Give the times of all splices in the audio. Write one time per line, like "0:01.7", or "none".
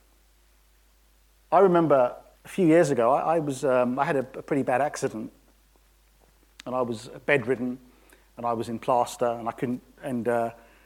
0:02.3

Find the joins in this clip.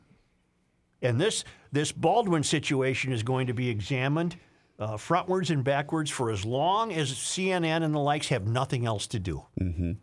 none

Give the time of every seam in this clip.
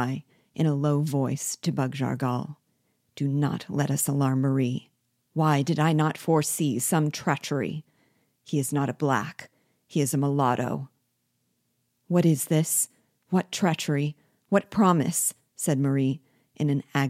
0:05.3

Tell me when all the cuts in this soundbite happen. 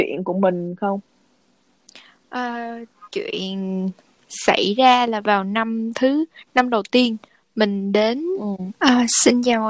0:03.1
0:08.7

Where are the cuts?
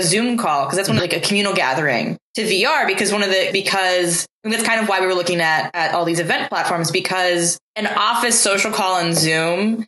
0:01.0
0:03.5

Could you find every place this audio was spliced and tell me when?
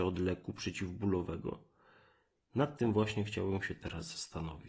0:02.4

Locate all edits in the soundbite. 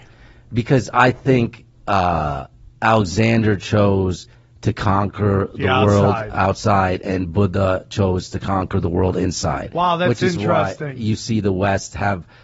none

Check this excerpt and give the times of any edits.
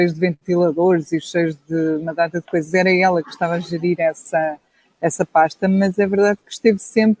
none

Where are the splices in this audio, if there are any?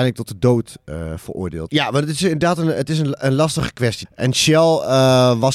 0:01.7
0:04.0

